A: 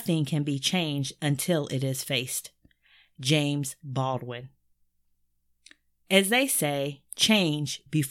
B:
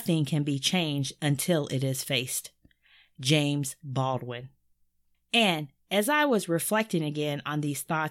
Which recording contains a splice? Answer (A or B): B